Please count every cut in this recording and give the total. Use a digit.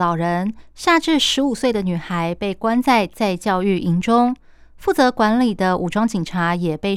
0